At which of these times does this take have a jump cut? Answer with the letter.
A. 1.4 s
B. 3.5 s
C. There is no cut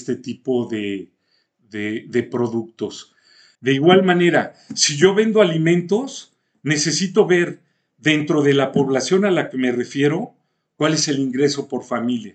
B